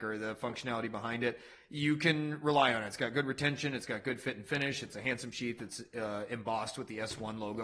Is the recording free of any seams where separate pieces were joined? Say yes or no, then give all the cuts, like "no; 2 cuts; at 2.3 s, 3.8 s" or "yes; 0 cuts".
yes; 0 cuts